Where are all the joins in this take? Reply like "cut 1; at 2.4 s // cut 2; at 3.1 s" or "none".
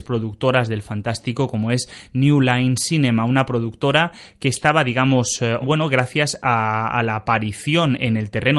cut 1; at 5.6 s